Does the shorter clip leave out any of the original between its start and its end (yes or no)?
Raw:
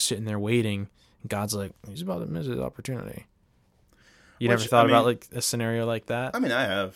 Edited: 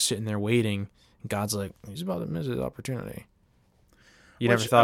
no